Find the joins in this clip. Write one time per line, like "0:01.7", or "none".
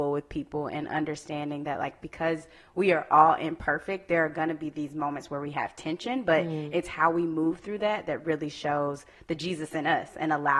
none